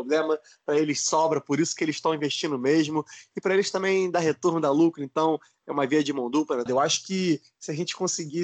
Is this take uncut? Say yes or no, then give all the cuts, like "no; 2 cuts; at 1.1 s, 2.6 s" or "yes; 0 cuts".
no; 1 cut; at 6.7 s